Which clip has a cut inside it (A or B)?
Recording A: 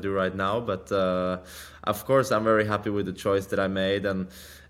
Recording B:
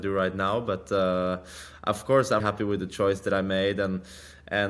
B